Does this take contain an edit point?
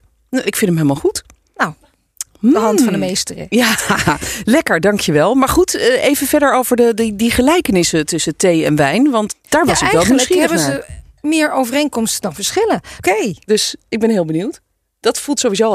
yes; 2 cuts; at 9.3 s, 13.0 s

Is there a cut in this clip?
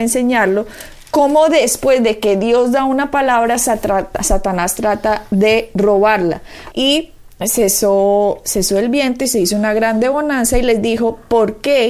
yes; 1 cut; at 6.7 s

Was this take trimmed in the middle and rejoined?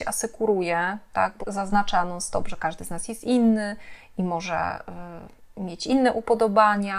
yes; 1 cut; at 1.4 s

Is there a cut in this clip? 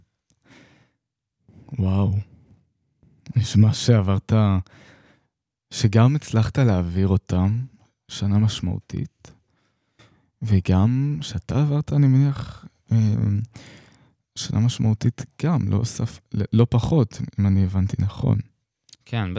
no; 0 cuts

